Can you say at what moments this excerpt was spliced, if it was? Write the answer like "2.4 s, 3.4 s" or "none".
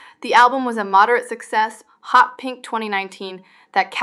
1.9 s